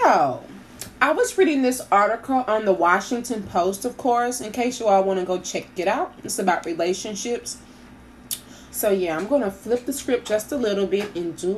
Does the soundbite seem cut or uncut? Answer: cut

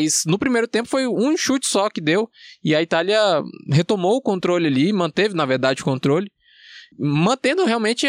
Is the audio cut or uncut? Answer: cut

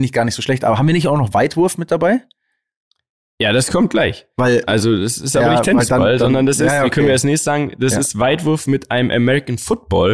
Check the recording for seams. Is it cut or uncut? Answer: uncut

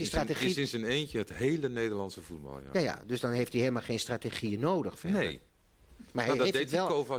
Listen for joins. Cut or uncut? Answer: uncut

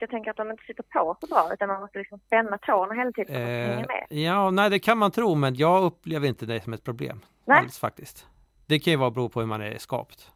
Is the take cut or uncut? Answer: uncut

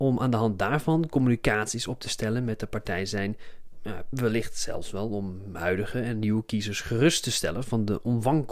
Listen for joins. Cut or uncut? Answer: cut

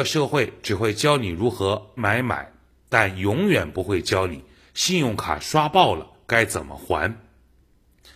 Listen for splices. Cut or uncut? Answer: cut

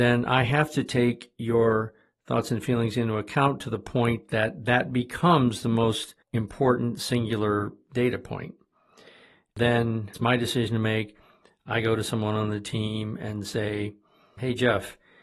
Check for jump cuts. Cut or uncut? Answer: uncut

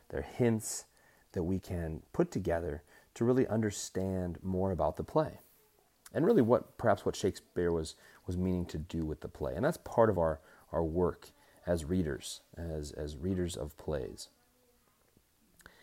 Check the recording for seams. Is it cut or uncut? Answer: uncut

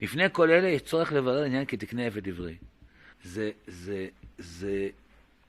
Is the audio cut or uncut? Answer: cut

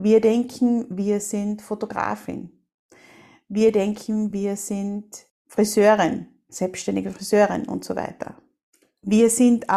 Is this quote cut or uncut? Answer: uncut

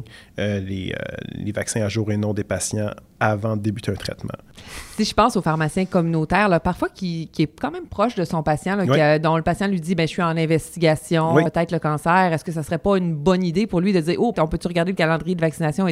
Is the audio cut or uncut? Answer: cut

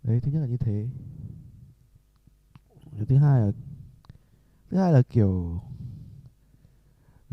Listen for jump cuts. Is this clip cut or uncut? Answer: uncut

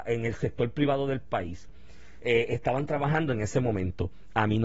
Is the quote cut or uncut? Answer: cut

